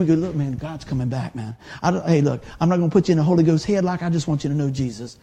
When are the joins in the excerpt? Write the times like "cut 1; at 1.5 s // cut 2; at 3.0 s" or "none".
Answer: none